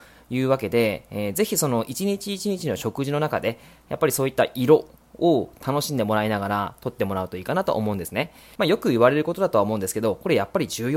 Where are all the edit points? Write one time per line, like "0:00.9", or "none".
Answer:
0:08.6